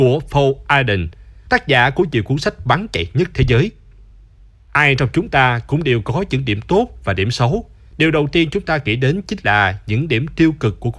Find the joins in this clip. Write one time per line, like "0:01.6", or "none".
0:07.9